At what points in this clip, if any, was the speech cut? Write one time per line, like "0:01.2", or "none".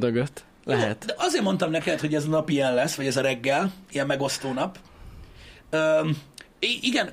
none